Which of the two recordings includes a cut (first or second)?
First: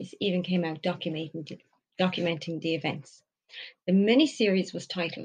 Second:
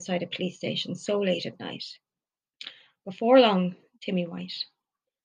second